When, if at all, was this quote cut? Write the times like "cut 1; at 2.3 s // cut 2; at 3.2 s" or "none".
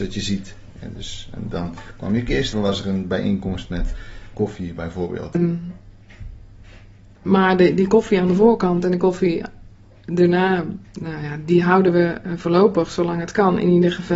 cut 1; at 2.5 s // cut 2; at 4.3 s // cut 3; at 5.3 s